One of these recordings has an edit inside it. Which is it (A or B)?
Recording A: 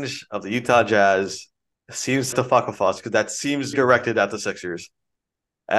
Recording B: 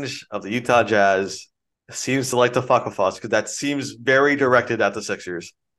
A